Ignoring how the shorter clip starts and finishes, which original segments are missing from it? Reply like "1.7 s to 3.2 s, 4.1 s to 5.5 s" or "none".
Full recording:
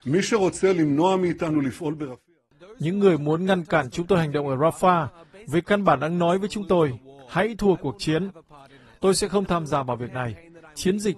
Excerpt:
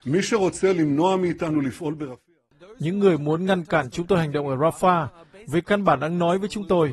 none